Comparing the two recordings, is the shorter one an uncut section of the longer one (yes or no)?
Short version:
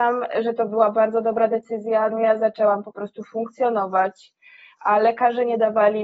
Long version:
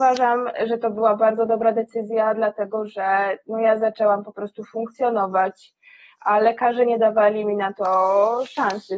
no